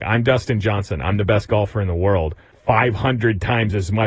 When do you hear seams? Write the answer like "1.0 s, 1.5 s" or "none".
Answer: 2.5 s